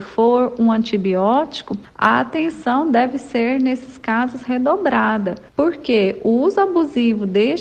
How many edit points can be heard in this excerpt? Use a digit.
1